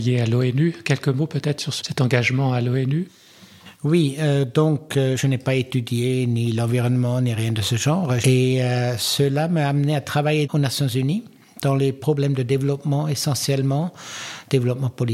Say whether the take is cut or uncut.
cut